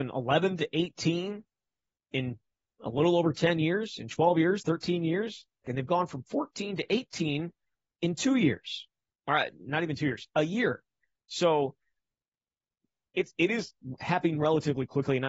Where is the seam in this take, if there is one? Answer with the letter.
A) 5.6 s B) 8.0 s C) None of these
A